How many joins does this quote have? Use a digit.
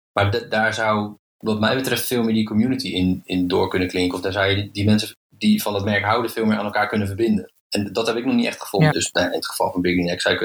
2